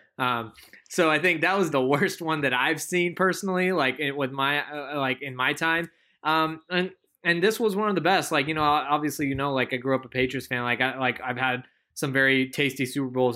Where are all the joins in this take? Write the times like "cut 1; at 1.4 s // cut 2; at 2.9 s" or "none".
cut 1; at 1.7 s